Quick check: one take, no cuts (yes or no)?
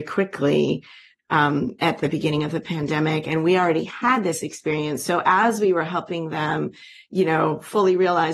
yes